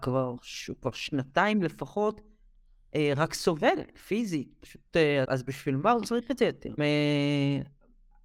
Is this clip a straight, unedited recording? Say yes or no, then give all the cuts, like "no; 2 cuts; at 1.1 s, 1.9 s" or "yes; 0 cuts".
no; 2 cuts; at 5.2 s, 6.8 s